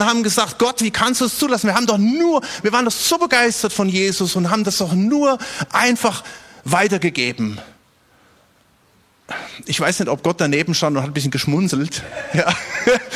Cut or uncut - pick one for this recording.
uncut